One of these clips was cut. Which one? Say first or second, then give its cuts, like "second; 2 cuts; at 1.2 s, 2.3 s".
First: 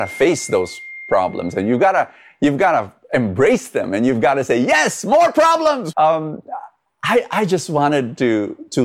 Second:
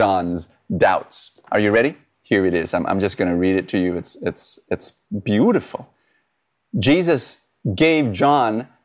first; 1 cut; at 5.9 s